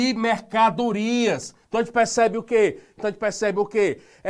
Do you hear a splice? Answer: yes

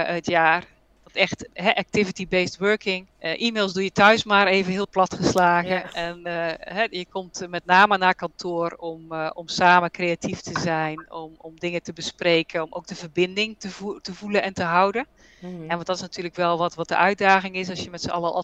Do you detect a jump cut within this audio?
yes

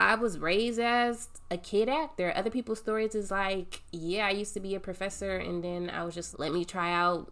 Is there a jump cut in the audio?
yes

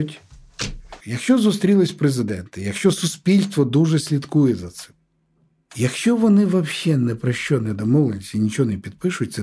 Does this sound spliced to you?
yes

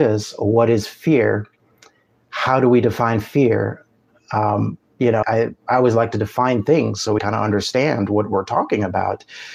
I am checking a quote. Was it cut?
yes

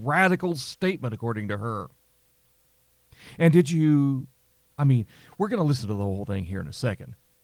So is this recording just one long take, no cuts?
yes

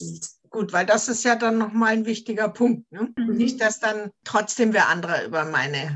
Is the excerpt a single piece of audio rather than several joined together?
yes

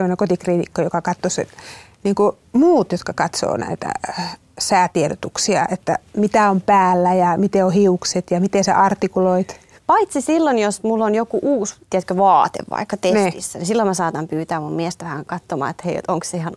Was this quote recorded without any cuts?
no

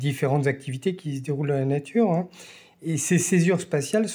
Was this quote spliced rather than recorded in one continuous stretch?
no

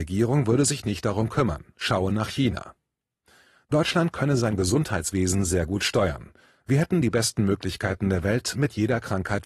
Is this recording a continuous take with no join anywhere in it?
yes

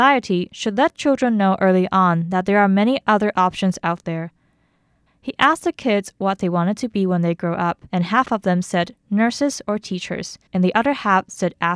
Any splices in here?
yes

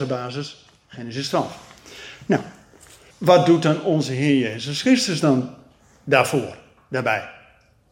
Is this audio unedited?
no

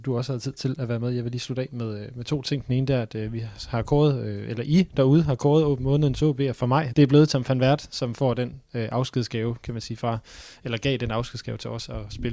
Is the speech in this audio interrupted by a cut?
yes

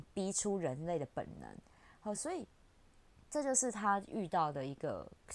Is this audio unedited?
yes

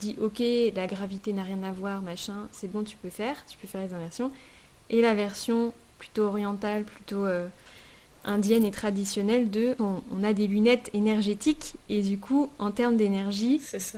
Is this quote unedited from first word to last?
yes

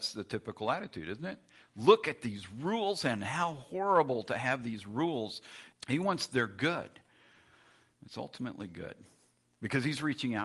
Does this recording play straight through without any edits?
no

